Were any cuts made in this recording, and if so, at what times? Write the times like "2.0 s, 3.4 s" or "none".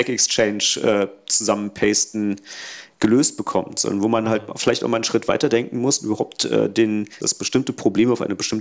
7.2 s